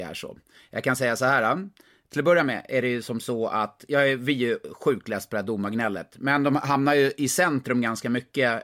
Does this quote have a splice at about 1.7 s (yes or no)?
no